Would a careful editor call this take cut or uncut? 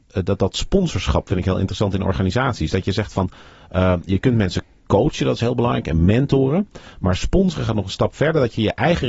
uncut